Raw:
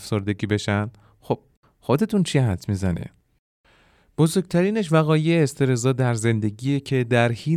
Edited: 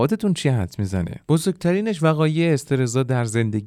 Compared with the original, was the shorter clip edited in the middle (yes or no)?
yes